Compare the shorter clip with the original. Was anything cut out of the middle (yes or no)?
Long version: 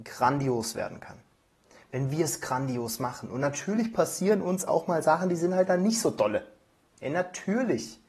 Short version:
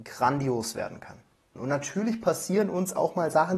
yes